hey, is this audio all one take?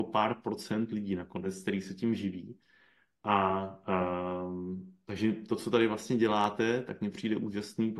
yes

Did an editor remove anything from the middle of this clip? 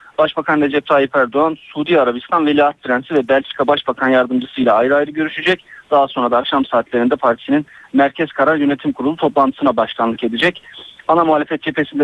no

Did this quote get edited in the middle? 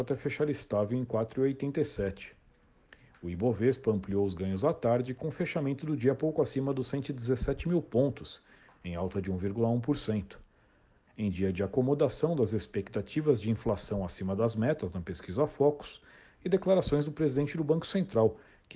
yes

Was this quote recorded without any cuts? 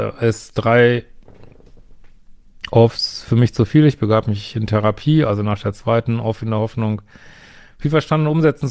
yes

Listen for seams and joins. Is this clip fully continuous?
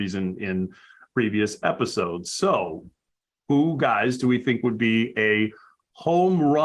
yes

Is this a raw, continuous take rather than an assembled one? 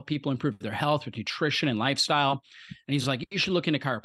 yes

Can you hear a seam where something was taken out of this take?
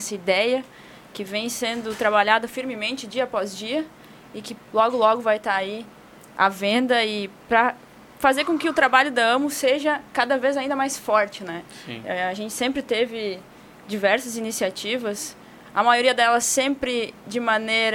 no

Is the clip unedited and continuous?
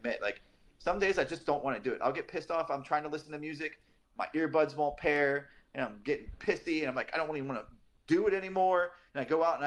no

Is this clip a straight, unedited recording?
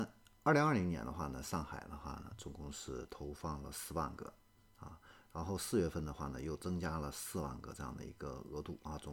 yes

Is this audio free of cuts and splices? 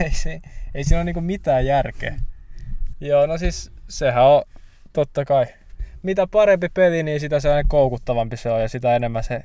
no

